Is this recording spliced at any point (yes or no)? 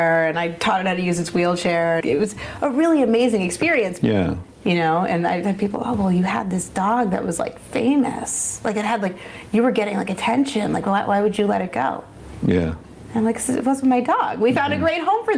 yes